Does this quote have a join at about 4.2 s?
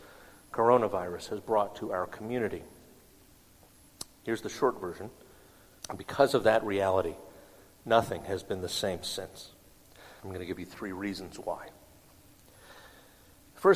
no; 2 cuts; at 5.8 s, 10.2 s

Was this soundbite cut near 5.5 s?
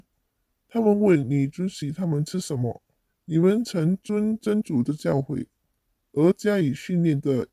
no; 1 cut; at 3.1 s

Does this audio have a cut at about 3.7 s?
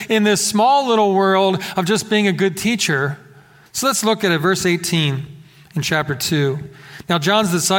yes; 1 cut; at 3.7 s

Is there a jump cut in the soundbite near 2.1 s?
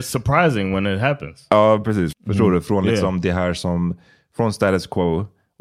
yes; 1 cut; at 2.1 s

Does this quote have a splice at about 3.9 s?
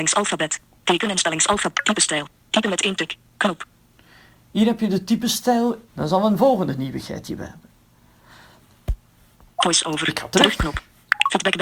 no; 1 cut; at 5.9 s

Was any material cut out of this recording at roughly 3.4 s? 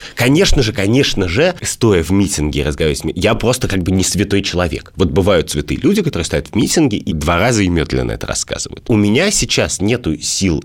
no; 0 cuts

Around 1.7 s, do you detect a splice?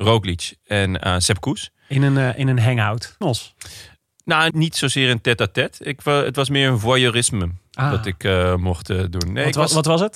no; 2 cuts; at 3.2 s, 4.5 s

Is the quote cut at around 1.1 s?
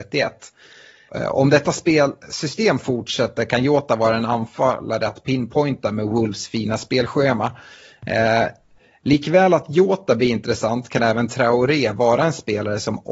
yes; 1 cut; at 1.1 s

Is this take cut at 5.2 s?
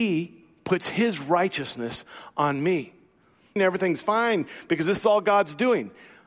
no; 1 cut; at 3.6 s

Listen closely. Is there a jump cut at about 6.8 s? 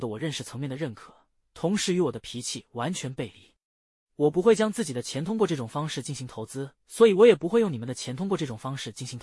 yes; 2 cuts; at 1.4 s, 6.8 s

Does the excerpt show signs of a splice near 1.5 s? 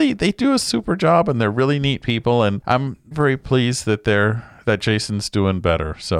no; 1 cut; at 3.1 s

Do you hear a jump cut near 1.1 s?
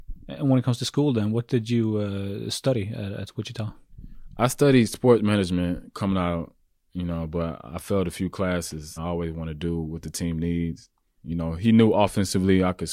no; 2 cuts; at 9.0 s, 11.1 s

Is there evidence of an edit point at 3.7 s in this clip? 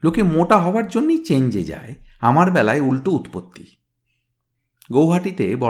no; 0 cuts

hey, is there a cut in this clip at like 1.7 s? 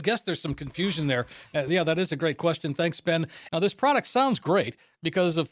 yes; 2 cuts; at 1.7 s, 3.5 s

